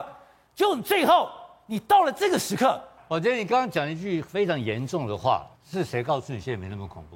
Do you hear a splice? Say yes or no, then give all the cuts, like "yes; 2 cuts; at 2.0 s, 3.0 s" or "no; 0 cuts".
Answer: yes; 2 cuts; at 3.0 s, 5.5 s